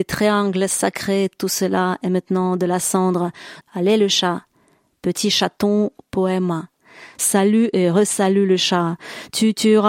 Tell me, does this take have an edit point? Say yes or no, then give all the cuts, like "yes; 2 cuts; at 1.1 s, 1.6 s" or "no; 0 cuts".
yes; 2 cuts; at 3.6 s, 7.2 s